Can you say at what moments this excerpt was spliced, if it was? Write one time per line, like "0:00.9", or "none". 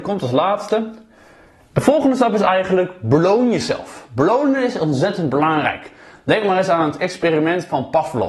none